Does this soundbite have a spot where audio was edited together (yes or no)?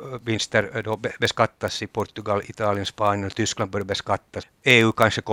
yes